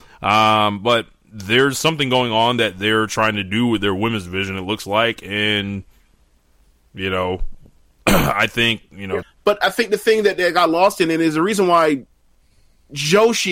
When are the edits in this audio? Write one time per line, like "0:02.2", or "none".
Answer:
0:09.2